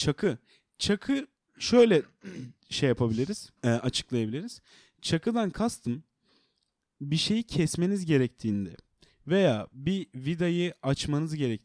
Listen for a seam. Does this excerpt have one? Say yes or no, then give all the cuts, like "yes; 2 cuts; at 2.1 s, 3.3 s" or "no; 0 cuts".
yes; 1 cut; at 3.6 s